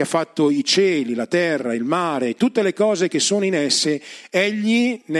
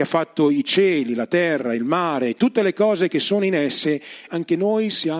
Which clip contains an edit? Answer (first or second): second